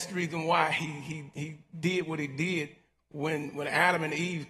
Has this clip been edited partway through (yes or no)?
no